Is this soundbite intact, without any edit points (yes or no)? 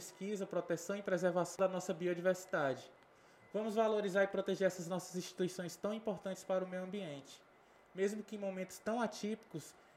yes